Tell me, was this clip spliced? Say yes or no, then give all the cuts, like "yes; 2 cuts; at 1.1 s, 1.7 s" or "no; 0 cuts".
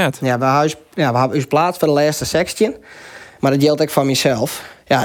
yes; 1 cut; at 3.4 s